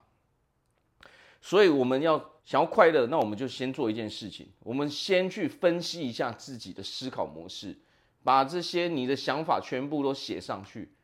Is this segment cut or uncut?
cut